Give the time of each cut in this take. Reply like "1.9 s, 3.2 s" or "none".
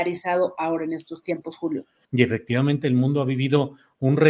2.0 s